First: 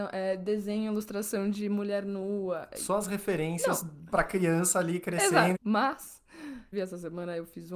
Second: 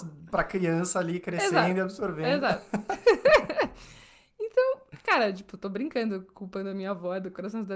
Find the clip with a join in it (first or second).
first